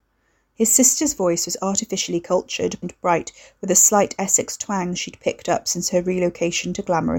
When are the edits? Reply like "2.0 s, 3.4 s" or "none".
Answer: 2.8 s